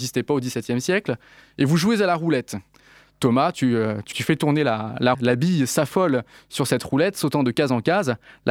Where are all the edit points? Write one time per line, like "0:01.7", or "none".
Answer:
0:04.1
0:05.1

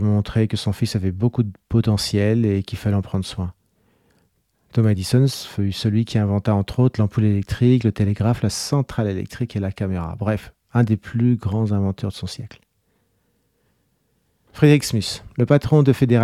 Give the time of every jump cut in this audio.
0:08.4
0:14.5

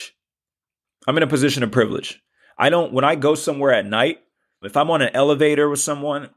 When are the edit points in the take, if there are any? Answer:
0:04.6

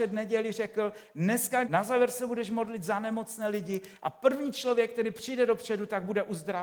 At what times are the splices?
0:01.6

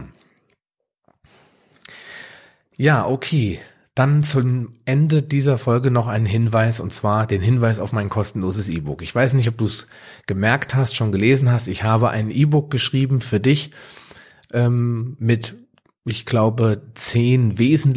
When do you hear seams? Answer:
none

